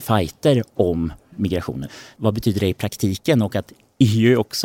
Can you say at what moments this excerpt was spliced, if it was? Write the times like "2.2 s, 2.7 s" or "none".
2.2 s

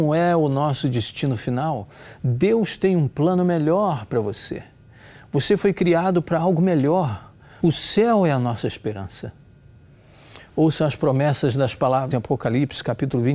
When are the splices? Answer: 7.6 s, 12.1 s

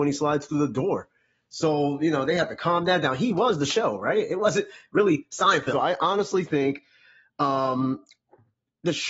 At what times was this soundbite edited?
5.7 s

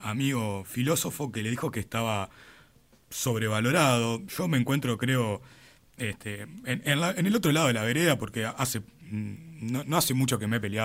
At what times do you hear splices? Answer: none

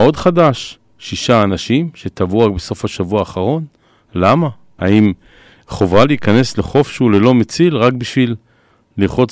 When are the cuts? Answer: 4.8 s

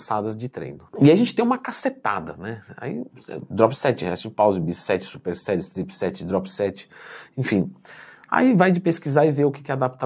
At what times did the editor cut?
none

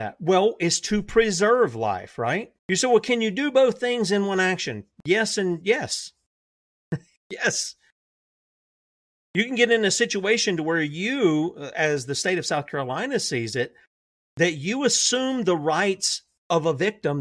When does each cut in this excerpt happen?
2.6 s

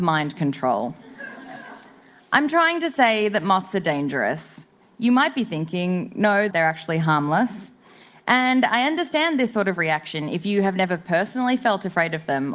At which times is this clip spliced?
6.5 s

